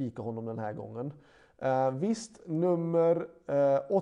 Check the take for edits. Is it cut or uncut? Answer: uncut